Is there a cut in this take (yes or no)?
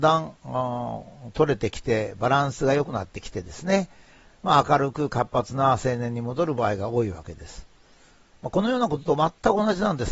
no